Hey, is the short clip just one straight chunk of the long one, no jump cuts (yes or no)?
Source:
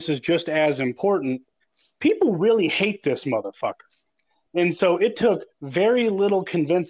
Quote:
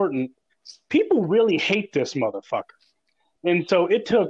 yes